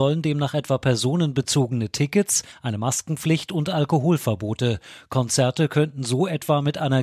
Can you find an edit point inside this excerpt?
no; 0 cuts

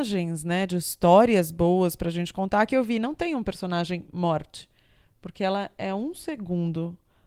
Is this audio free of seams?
yes; 0 cuts

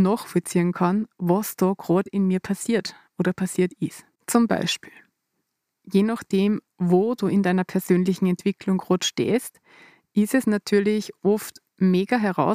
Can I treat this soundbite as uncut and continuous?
no; 1 cut; at 4.1 s

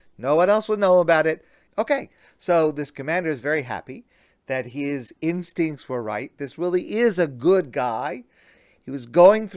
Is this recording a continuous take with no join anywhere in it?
no; 1 cut; at 1.7 s

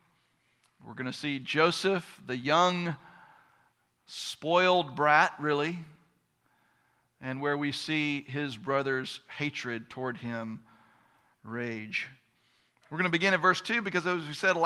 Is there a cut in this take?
no; 0 cuts

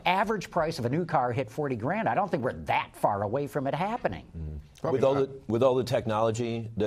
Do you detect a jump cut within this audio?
no; 0 cuts

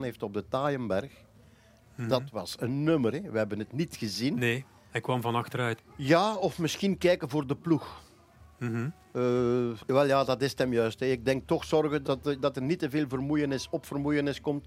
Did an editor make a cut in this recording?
yes; 3 cuts; at 5.8 s, 9.8 s, 12.0 s

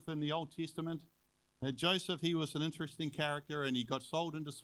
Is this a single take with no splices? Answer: yes; 0 cuts

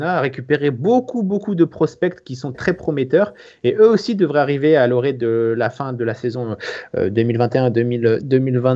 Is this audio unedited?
no; 1 cut; at 2.5 s

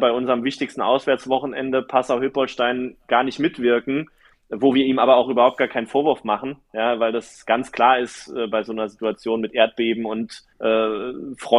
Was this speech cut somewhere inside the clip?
yes; 1 cut; at 10.5 s

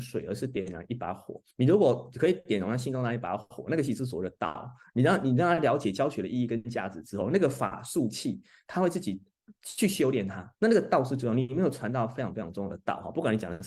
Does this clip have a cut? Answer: yes; 2 cuts; at 1.5 s, 10.5 s

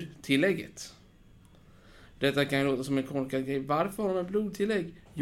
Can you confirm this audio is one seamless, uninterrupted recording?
yes; 0 cuts

